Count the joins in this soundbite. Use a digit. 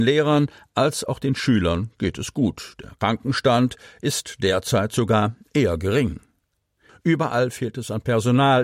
1